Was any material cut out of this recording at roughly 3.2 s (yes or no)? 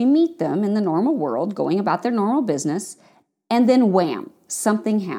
no